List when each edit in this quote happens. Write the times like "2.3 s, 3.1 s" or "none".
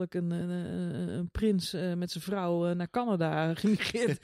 none